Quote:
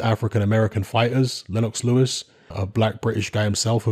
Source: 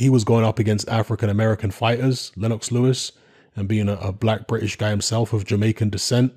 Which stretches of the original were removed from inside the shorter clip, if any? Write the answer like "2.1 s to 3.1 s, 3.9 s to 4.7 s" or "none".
3.4 s to 4.0 s